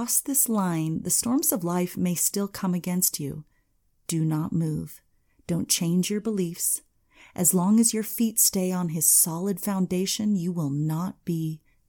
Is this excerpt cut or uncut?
uncut